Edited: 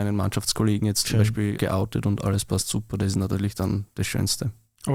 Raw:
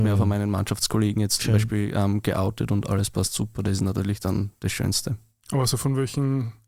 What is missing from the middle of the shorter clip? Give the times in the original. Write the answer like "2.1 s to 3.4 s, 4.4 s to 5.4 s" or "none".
1.9 s to 2.2 s